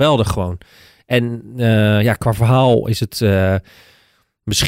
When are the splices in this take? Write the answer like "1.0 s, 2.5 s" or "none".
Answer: none